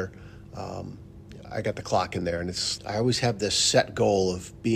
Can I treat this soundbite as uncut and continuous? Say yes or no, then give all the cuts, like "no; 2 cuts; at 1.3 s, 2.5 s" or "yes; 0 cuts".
no; 1 cut; at 2.8 s